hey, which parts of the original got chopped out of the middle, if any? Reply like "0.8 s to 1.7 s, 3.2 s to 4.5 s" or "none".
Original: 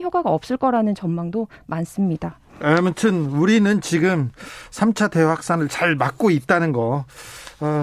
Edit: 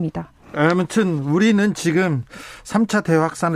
none